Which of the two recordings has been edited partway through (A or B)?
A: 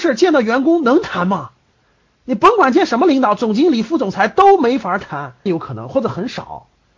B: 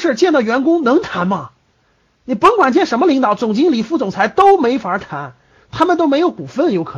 A